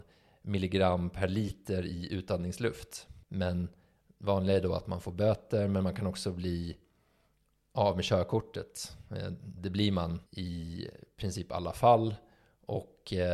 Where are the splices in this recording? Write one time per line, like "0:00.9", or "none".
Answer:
0:03.2
0:10.3

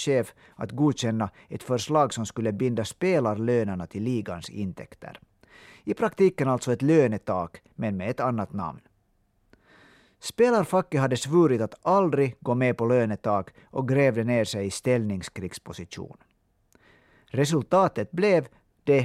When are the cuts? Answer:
none

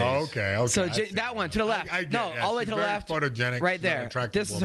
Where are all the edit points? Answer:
none

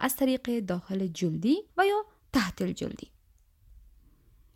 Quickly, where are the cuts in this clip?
0:01.7

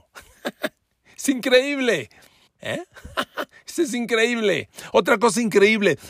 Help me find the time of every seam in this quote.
0:02.5

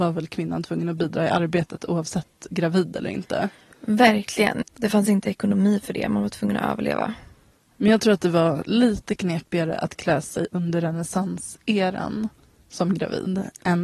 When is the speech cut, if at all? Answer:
0:04.6

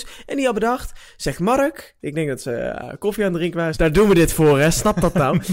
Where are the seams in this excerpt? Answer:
0:03.7

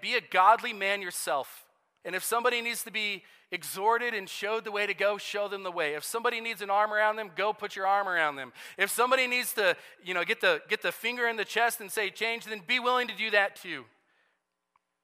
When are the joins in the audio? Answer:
0:02.0

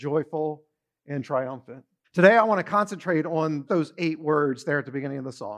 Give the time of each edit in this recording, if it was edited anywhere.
0:02.0
0:03.7

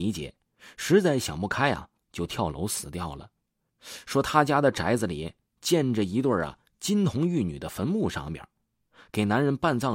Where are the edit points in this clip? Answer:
0:03.7

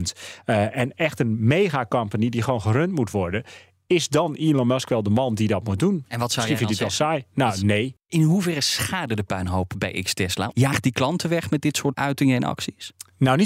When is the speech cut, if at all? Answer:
0:11.9

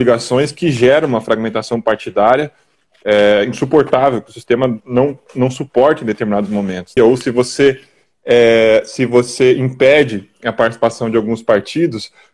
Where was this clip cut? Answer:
0:07.0

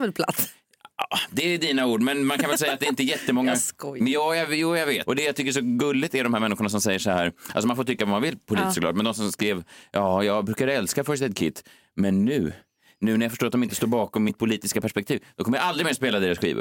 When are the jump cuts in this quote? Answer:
0:05.1

